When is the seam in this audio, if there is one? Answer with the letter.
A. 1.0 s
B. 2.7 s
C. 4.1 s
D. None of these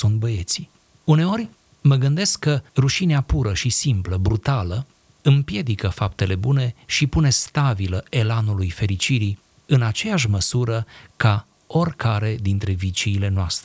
B